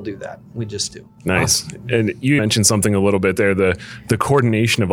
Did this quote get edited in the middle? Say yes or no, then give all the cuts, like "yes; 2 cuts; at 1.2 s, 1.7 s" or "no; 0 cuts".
yes; 2 cuts; at 1.2 s, 2.4 s